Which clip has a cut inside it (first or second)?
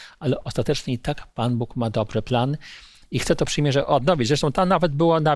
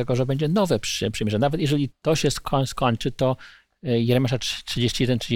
second